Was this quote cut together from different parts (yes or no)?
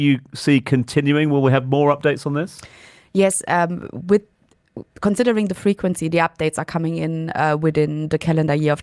no